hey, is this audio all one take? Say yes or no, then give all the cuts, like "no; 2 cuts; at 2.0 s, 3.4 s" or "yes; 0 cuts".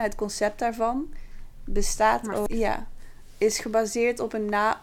no; 1 cut; at 2.5 s